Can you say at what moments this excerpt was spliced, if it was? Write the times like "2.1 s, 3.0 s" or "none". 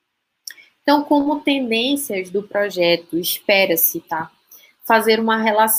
none